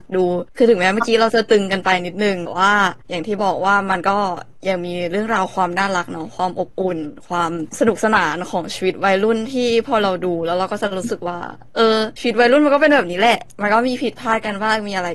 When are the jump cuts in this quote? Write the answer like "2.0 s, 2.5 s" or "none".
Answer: none